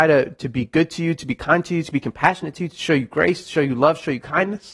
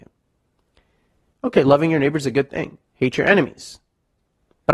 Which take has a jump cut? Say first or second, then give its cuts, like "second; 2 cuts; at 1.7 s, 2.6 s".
second; 2 cuts; at 1.3 s, 2.9 s